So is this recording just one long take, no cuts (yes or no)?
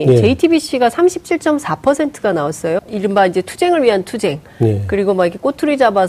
no